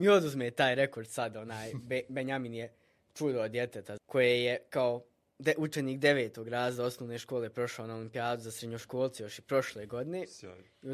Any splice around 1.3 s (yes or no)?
no